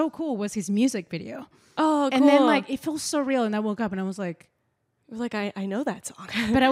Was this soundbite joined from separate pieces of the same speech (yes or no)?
no